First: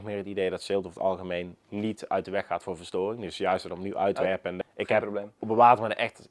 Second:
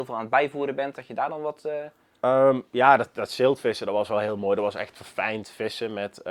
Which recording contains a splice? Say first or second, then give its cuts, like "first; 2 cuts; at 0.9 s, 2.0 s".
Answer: first; 1 cut; at 4.6 s